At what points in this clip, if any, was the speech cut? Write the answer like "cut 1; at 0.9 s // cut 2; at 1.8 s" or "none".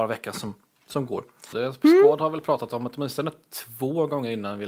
cut 1; at 1.5 s

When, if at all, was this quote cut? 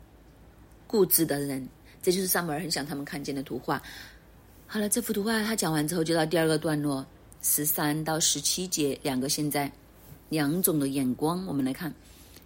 none

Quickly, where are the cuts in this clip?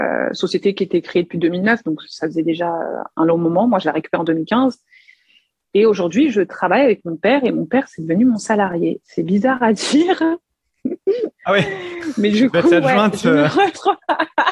none

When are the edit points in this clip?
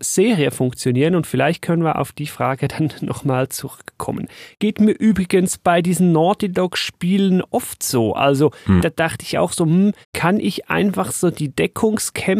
cut 1; at 8.8 s // cut 2; at 10.0 s

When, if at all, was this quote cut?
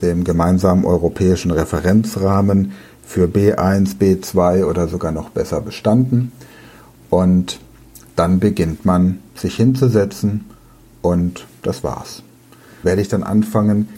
cut 1; at 12.8 s

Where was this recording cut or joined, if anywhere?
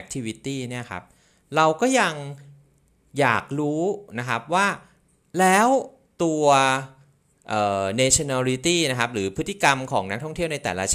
none

